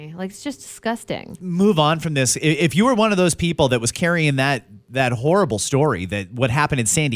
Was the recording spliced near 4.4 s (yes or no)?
no